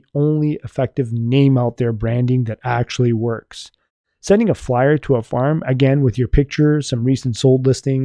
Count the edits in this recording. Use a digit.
0